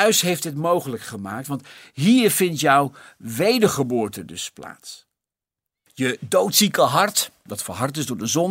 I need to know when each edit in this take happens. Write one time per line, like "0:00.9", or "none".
0:05.9